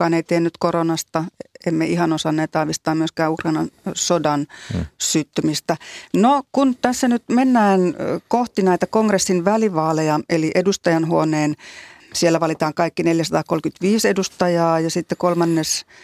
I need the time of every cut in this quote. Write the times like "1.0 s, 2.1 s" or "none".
10.3 s, 12.0 s